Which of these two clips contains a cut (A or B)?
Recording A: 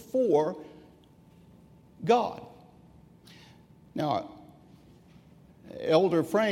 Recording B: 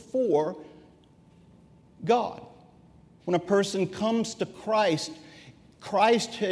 B